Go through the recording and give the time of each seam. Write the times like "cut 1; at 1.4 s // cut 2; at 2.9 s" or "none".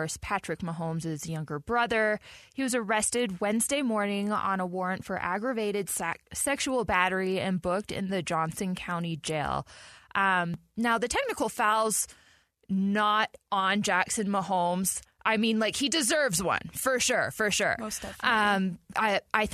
none

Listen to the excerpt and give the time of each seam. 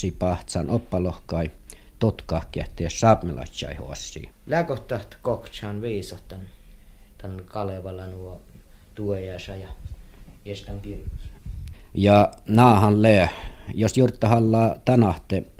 cut 1; at 4.3 s // cut 2; at 11.7 s

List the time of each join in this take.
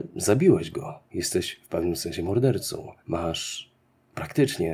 cut 1; at 3.0 s

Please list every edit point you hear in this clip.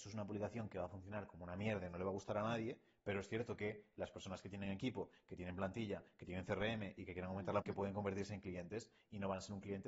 cut 1; at 7.6 s

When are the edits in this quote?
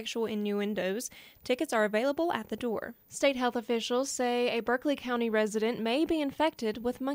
cut 1; at 3.0 s

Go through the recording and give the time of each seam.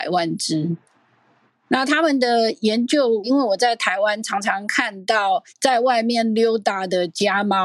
cut 1; at 3.2 s // cut 2; at 5.5 s

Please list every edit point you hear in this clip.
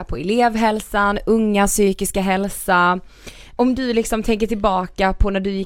cut 1; at 3.6 s

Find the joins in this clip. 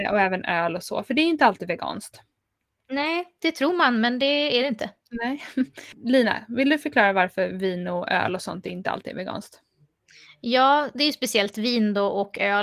none

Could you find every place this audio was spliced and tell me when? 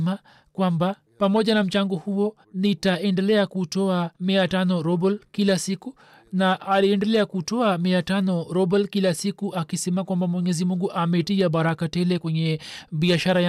cut 1; at 1.1 s // cut 2; at 2.4 s // cut 3; at 4.1 s

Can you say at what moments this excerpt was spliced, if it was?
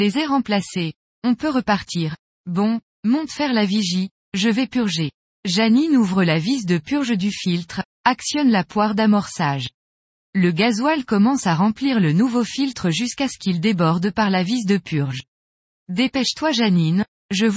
cut 1; at 2.3 s

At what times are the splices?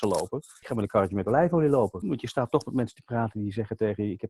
cut 1; at 2.0 s

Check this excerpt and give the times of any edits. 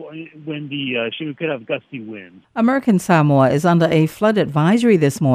cut 1; at 1.2 s // cut 2; at 2.4 s

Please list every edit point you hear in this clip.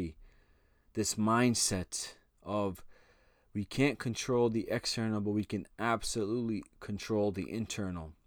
none

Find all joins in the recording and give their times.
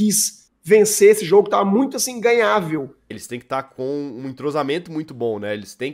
cut 1; at 3.1 s

